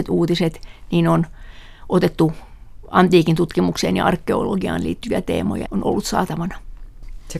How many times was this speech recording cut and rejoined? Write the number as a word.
one